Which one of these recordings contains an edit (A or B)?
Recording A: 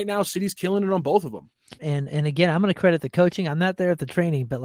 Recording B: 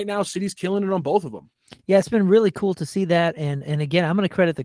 A